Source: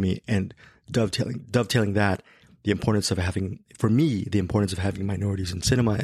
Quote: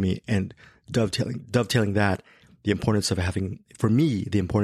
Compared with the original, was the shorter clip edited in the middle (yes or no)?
no